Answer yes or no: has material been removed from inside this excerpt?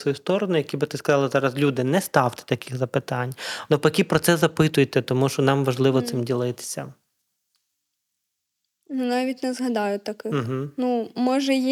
yes